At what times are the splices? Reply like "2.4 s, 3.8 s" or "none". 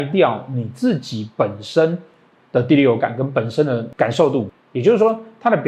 4.6 s